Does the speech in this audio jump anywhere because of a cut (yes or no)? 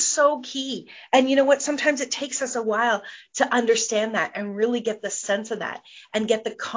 no